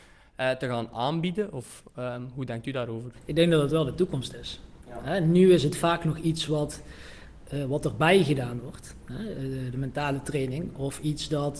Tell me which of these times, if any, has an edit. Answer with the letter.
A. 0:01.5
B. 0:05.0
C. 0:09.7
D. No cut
D